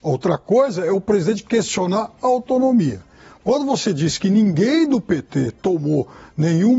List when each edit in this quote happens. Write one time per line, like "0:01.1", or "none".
none